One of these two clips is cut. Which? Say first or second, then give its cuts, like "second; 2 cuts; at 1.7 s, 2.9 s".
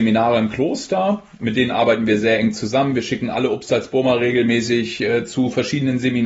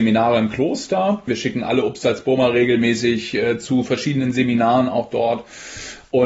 second; 1 cut; at 1.3 s